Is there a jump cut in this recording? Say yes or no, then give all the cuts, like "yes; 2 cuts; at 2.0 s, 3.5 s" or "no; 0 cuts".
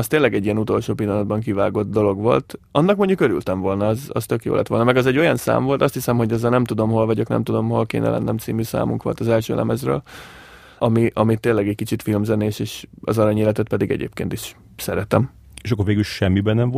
no; 0 cuts